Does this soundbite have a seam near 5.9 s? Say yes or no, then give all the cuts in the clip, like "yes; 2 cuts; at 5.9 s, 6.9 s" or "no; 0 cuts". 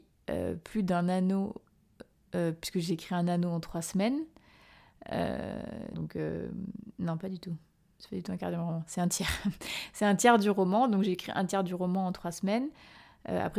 yes; 1 cut; at 5.9 s